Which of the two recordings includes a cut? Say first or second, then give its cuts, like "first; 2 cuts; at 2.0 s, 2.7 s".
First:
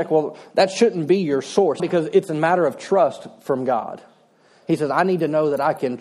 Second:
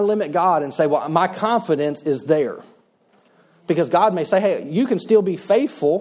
first; 1 cut; at 1.8 s